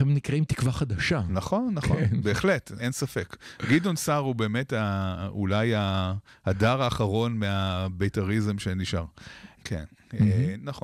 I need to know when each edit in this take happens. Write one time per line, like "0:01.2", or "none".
0:02.8
0:09.6